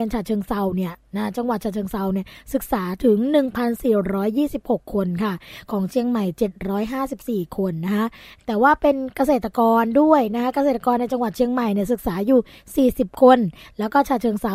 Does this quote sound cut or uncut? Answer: uncut